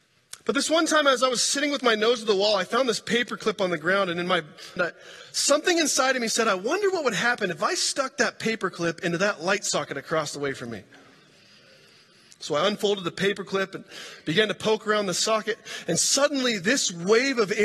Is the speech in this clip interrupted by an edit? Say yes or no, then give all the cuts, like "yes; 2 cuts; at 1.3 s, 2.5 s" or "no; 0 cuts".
yes; 1 cut; at 4.8 s